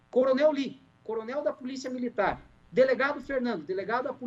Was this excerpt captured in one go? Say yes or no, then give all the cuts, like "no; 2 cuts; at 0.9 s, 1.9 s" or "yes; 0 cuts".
yes; 0 cuts